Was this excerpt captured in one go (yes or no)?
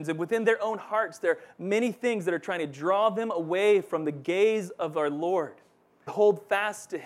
no